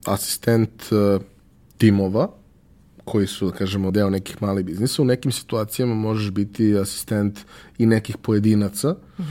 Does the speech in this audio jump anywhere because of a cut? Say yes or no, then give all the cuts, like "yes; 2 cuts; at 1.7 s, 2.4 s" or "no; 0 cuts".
yes; 1 cut; at 3.9 s